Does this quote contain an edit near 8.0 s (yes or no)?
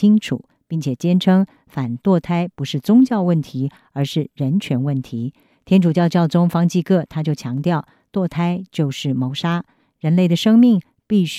no